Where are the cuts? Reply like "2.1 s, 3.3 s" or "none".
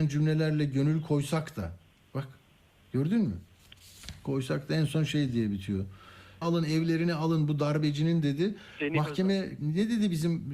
6.4 s, 9.6 s